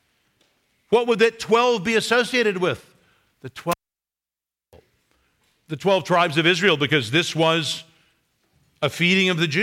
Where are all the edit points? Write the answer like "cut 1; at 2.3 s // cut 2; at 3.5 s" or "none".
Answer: none